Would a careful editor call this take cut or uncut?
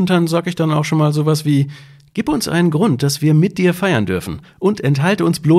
uncut